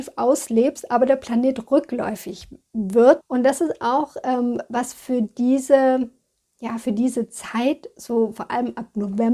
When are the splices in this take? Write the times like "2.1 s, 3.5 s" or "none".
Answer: 3.2 s